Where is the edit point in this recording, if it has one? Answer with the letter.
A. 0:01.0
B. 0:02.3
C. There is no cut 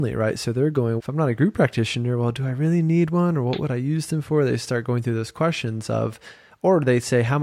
A